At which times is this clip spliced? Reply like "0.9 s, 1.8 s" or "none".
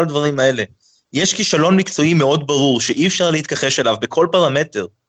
none